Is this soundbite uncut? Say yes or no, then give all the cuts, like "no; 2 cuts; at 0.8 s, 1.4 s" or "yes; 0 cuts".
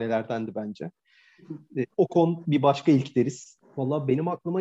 no; 2 cuts; at 1.9 s, 3.6 s